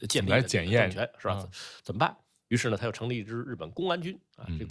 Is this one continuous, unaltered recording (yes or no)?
yes